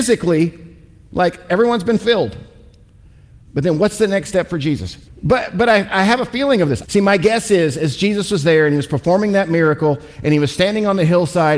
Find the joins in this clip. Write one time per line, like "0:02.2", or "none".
0:05.1
0:06.8